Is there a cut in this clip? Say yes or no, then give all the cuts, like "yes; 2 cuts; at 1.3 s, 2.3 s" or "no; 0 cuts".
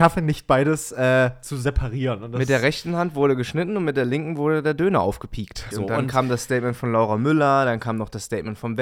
yes; 1 cut; at 5.7 s